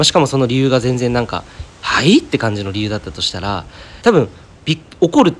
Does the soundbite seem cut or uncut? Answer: cut